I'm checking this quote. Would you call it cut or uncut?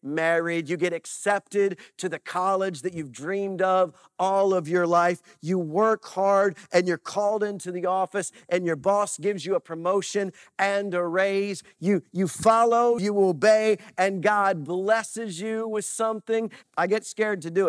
cut